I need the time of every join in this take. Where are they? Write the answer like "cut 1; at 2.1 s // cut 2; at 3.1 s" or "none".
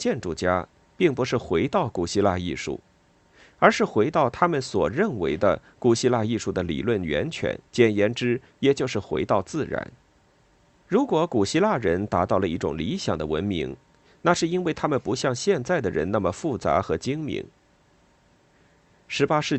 cut 1; at 7.7 s // cut 2; at 10.8 s